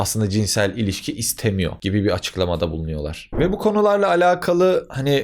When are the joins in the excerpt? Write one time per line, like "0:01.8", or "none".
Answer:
0:03.3